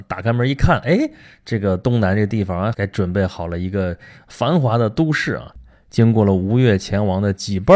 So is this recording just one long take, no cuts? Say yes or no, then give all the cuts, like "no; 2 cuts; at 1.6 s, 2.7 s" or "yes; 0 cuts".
no; 1 cut; at 2.7 s